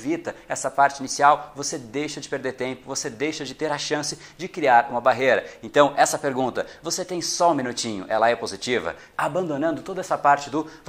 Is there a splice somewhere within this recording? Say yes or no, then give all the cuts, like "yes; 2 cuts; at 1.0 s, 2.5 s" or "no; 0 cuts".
yes; 1 cut; at 9.1 s